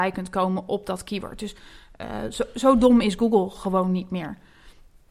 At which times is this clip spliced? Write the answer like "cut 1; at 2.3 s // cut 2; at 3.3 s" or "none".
none